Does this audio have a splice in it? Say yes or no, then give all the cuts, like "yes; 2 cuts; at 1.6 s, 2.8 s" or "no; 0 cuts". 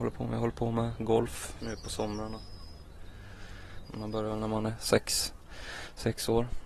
yes; 2 cuts; at 1.6 s, 3.8 s